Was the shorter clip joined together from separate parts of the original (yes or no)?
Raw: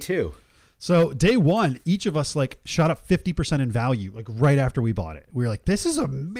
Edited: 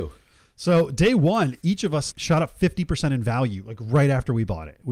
yes